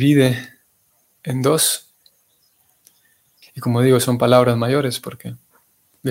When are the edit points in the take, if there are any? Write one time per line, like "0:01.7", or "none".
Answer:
0:03.4